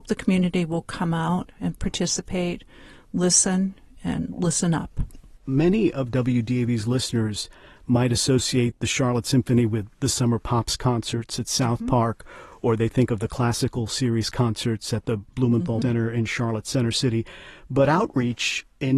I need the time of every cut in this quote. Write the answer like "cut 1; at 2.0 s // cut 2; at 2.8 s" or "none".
cut 1; at 15.8 s